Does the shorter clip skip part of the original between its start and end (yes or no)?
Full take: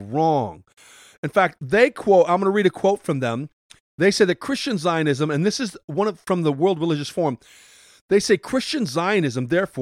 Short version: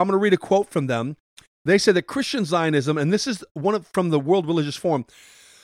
no